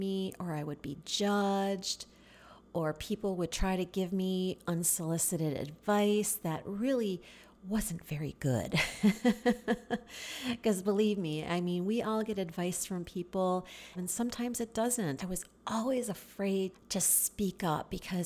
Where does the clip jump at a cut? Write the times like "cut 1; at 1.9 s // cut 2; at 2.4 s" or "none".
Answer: cut 1; at 13.9 s // cut 2; at 15.2 s // cut 3; at 16.7 s